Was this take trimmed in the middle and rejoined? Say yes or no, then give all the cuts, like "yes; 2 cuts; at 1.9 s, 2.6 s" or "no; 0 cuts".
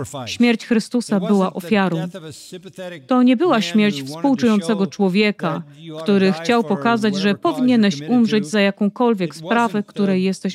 no; 0 cuts